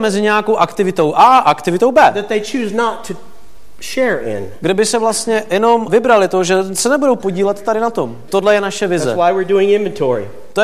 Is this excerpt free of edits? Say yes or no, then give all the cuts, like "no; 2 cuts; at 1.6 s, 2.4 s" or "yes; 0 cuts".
no; 2 cuts; at 5.9 s, 8.3 s